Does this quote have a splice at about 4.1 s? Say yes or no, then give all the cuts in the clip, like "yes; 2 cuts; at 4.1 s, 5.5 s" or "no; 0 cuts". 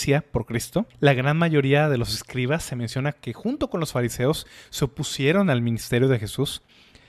no; 1 cut; at 0.9 s